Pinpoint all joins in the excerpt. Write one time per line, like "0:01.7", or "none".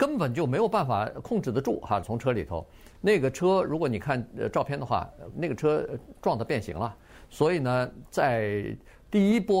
0:02.0
0:05.3

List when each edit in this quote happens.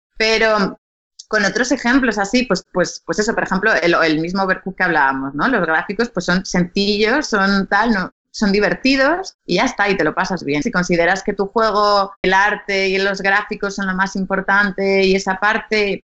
0:10.6
0:12.2

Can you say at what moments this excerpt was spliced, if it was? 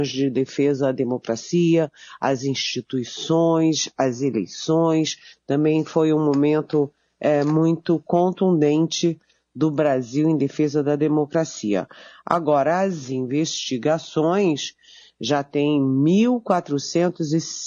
none

